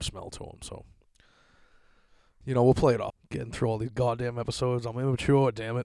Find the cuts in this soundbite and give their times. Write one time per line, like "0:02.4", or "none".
0:03.1